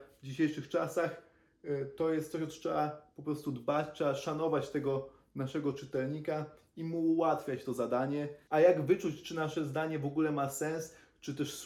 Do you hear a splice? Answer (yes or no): yes